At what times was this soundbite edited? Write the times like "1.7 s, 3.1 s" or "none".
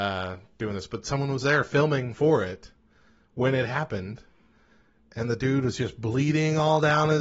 none